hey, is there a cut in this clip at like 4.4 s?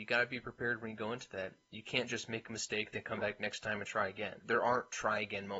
yes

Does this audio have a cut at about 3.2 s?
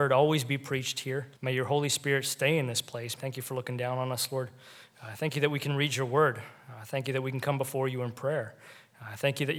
yes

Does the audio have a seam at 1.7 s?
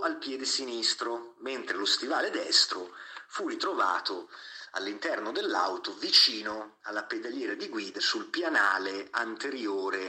no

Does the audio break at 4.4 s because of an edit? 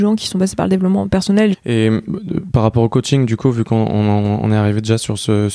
no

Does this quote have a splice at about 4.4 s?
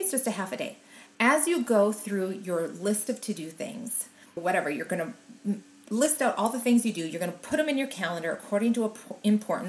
yes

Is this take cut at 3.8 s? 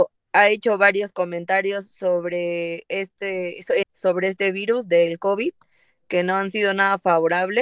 yes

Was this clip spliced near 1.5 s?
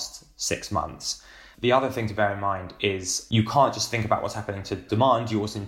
yes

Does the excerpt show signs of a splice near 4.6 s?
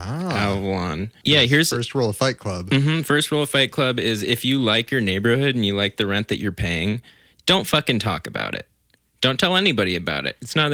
no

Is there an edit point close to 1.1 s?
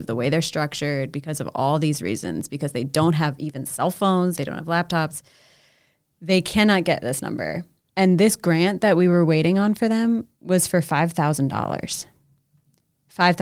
no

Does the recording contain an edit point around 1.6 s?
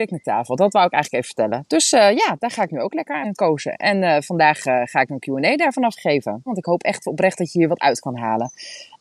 no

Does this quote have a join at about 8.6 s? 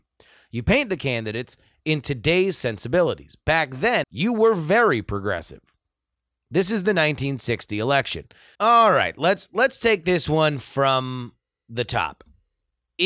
yes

